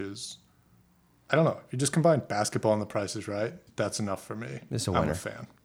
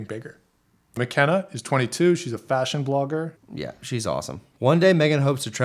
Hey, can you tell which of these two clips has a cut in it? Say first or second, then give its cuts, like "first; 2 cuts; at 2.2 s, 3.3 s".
second; 2 cuts; at 3.4 s, 4.5 s